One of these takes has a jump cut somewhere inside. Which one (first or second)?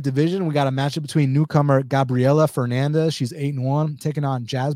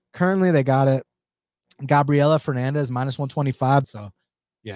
second